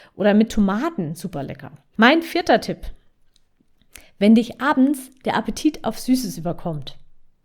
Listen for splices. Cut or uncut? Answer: cut